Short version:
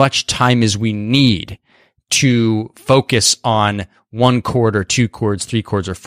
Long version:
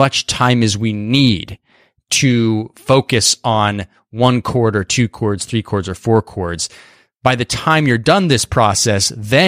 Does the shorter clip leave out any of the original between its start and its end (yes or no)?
no